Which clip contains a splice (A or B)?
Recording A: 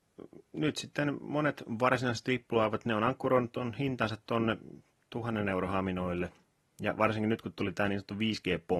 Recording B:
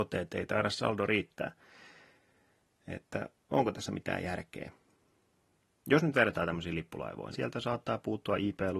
B